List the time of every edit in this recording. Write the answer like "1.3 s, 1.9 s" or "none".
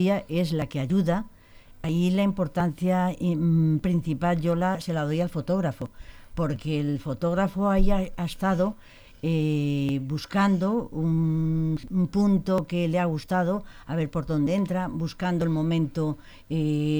13.8 s